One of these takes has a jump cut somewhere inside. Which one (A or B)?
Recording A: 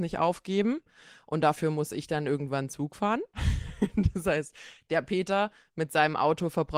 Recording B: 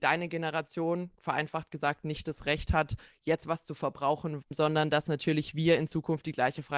B